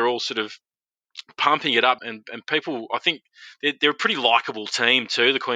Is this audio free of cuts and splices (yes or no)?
no